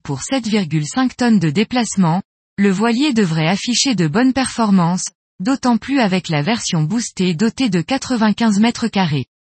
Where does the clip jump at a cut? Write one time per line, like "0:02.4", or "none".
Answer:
none